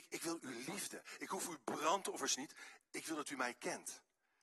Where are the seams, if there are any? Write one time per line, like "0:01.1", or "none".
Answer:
none

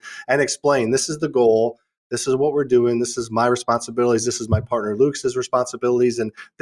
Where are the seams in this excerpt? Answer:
none

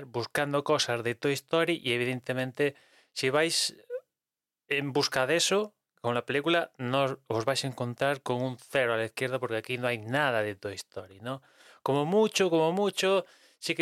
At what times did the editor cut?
none

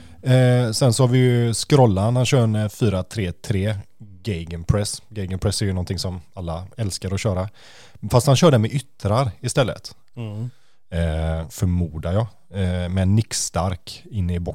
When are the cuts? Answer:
0:10.1
0:11.5

